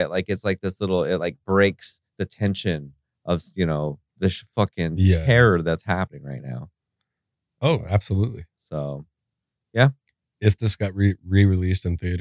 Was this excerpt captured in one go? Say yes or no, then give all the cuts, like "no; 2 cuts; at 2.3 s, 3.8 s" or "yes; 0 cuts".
yes; 0 cuts